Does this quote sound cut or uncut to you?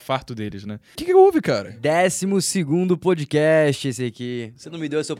cut